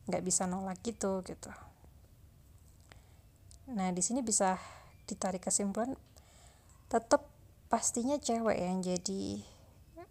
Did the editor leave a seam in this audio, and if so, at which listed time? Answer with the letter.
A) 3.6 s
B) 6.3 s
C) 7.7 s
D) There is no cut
D